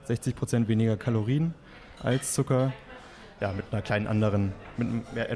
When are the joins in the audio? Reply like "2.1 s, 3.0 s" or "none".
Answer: 3.4 s